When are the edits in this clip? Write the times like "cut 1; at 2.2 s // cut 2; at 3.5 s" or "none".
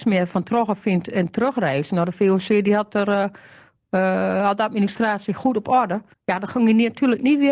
cut 1; at 6.1 s

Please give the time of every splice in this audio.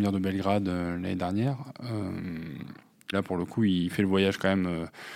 cut 1; at 3.1 s

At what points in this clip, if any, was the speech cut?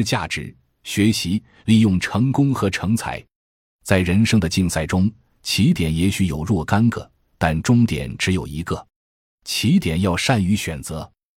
none

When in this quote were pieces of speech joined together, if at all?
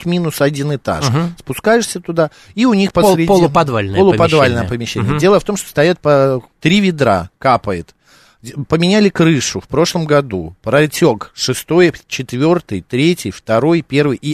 cut 1; at 6.5 s // cut 2; at 12.1 s

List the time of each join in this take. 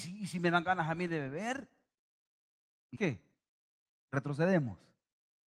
cut 1; at 2.9 s

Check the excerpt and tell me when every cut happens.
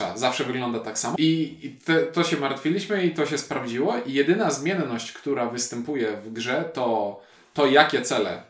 cut 1; at 1.2 s

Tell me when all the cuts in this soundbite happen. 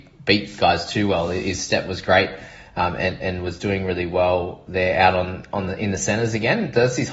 none

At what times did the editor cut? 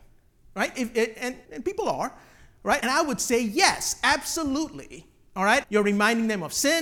cut 1; at 1.4 s // cut 2; at 2.8 s // cut 3; at 5.6 s

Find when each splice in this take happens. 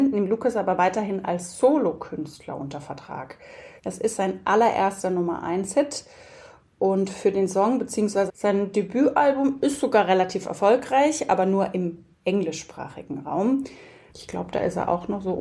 cut 1; at 3.8 s // cut 2; at 8.3 s // cut 3; at 14.1 s

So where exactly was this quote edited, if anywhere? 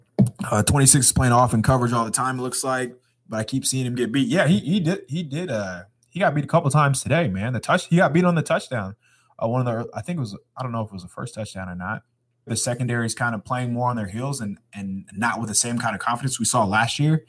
cut 1; at 12.5 s

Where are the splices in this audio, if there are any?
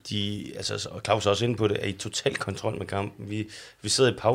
none

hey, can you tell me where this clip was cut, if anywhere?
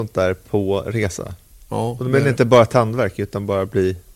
none

